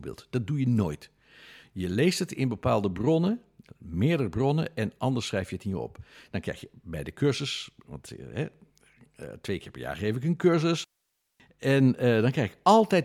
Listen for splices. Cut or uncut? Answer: uncut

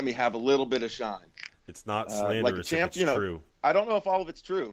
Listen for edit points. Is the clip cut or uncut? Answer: cut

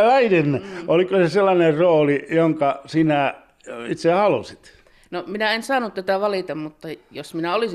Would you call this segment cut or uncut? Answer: uncut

